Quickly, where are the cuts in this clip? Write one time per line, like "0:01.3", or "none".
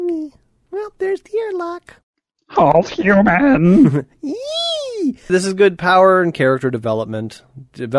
0:05.3